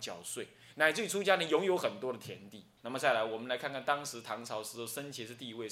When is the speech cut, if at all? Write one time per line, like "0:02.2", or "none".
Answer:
0:02.8

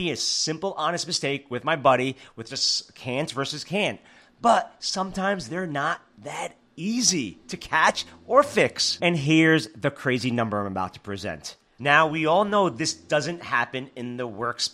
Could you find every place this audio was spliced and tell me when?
0:09.0
0:11.8

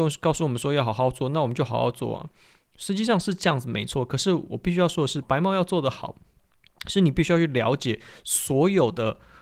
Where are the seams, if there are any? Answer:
0:05.2

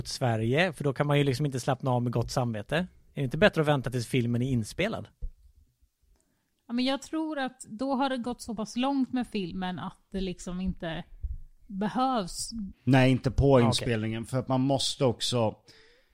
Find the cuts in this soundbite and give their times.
0:12.7

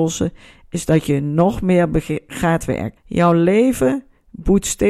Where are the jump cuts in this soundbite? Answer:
0:03.0

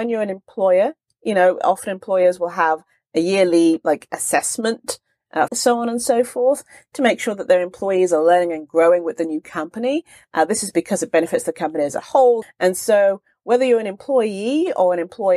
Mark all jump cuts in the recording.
0:05.5
0:12.4

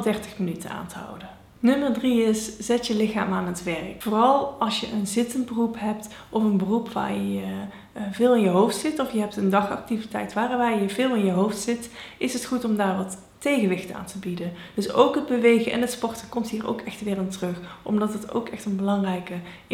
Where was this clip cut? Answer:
none

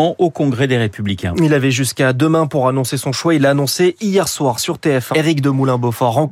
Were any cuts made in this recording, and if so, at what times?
0:05.1

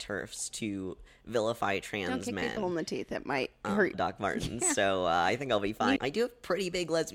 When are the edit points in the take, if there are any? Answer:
0:03.9
0:06.0

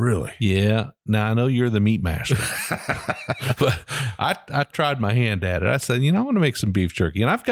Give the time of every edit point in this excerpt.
0:03.6

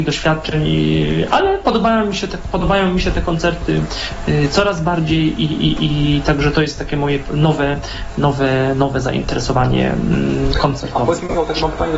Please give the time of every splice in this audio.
none

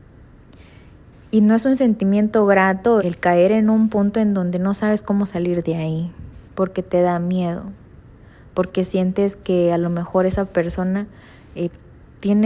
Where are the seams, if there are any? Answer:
0:03.0
0:06.5

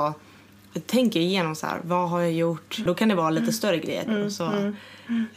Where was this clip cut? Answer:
0:02.9
0:04.1

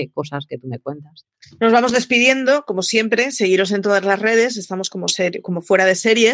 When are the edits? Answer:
none

